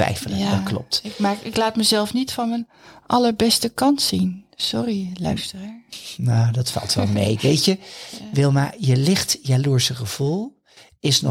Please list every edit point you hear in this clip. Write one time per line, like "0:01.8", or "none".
none